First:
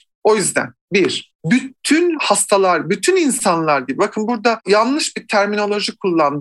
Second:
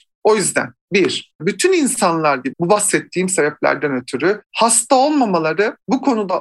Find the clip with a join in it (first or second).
second